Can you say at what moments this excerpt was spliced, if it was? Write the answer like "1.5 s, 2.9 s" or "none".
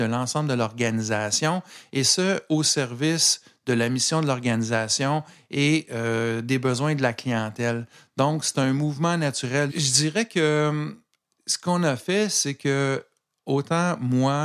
9.7 s